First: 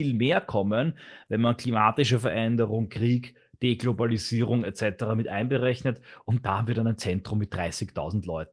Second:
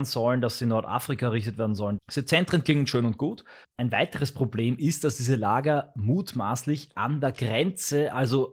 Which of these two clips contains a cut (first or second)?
second